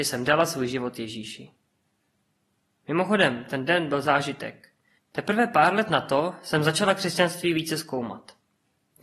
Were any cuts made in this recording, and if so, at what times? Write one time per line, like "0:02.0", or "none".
0:05.0

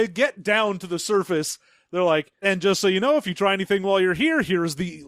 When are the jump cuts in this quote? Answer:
0:02.4

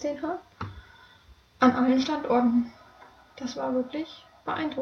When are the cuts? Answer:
none

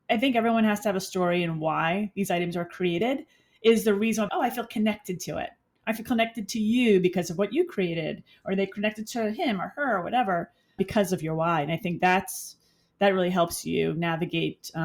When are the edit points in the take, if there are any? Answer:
0:04.3
0:10.8

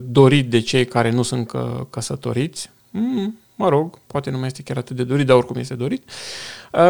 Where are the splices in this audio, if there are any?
none

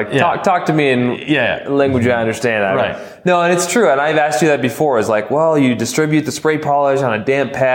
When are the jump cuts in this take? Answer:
none

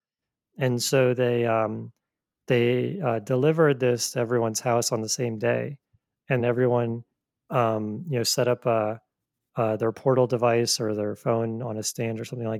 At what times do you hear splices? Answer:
0:06.4

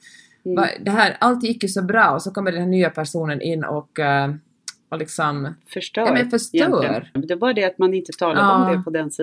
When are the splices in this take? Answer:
0:07.2

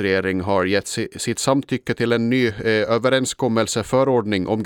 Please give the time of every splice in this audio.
none

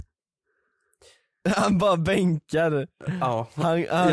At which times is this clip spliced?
none

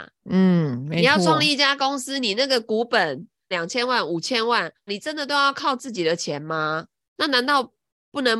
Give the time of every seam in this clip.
0:03.5
0:04.9

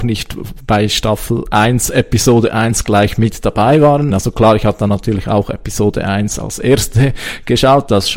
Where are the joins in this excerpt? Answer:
0:04.1

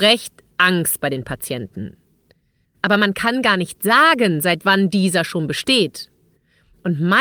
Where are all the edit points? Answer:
0:02.6

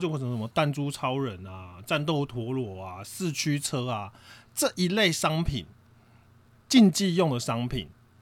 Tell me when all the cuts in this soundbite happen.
none

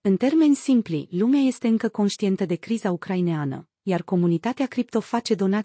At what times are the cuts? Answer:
none

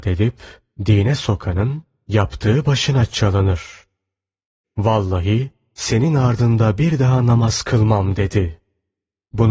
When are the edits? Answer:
0:04.6

